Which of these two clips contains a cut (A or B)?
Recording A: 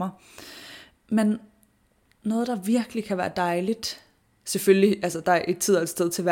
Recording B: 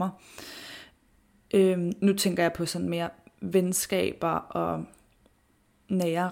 A